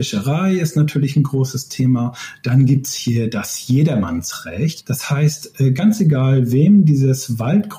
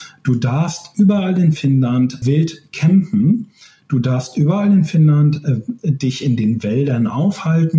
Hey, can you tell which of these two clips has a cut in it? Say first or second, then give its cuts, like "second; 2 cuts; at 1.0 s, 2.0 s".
second; 1 cut; at 2.2 s